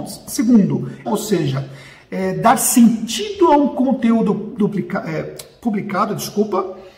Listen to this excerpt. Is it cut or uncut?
cut